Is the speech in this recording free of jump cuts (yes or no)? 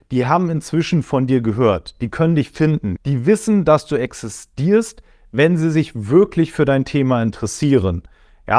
no